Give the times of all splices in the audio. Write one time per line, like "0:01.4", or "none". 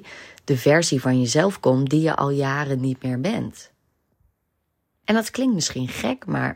0:05.0